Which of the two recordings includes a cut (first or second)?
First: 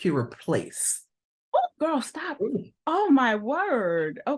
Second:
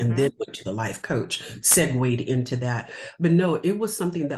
first